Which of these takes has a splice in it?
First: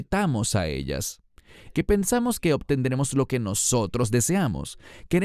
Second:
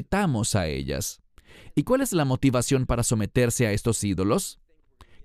first; 1 cut; at 1.7 s

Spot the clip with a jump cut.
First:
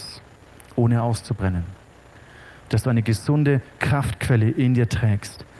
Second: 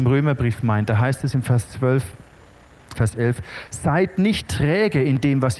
second; 1 cut; at 3.0 s

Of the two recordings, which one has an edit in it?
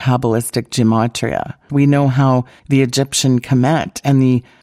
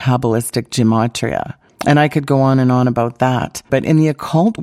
first; 1 cut; at 1.7 s

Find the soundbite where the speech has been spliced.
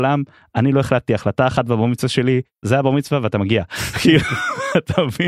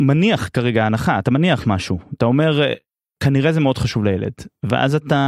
first; 1 cut; at 2.6 s

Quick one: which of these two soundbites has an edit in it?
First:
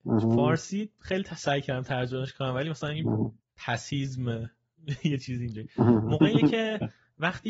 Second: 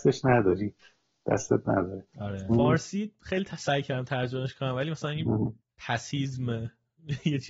second; 1 cut; at 2.5 s

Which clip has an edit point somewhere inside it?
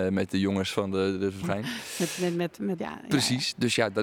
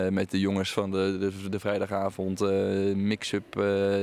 first; 2 cuts; at 1.4 s, 2.8 s

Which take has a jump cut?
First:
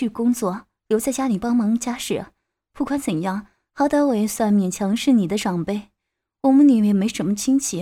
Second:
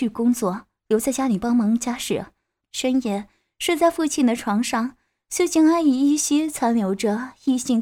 second; 1 cut; at 2.6 s

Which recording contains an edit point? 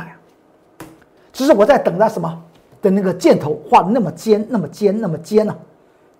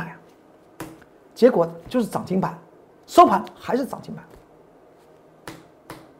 first; 2 cuts; at 1.2 s, 2.7 s

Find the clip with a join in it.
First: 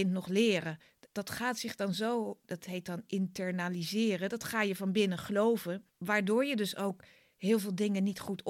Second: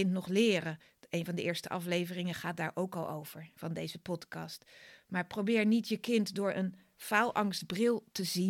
first; 2 cuts; at 1.1 s, 5.9 s

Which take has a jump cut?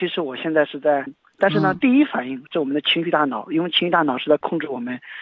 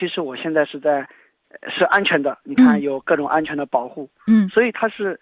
first; 1 cut; at 1.1 s

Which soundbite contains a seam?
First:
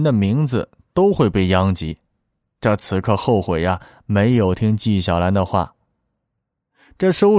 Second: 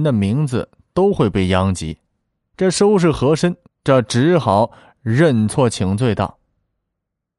second; 2 cuts; at 2.5 s, 3.7 s

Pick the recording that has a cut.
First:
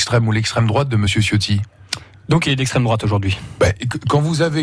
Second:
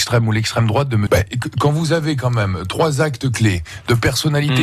second; 1 cut; at 1.1 s

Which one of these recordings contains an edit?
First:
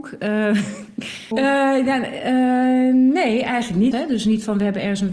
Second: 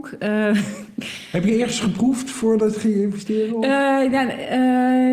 first; 2 cuts; at 1.3 s, 3.9 s

